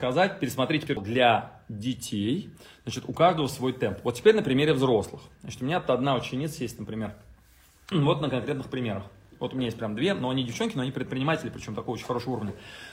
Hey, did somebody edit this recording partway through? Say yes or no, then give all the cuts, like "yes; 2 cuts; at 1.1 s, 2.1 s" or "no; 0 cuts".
yes; 1 cut; at 7.9 s